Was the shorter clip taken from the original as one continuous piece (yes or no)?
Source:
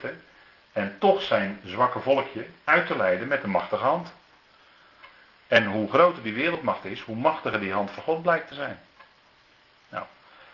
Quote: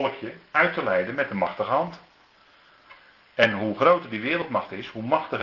yes